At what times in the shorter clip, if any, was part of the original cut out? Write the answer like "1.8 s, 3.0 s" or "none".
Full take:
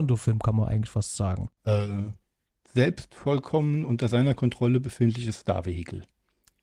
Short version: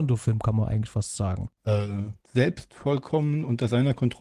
2.2 s